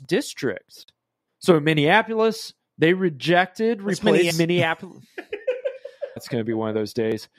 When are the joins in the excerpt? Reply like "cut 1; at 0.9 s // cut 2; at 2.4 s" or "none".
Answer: cut 1; at 1.3 s // cut 2; at 4.3 s // cut 3; at 6.2 s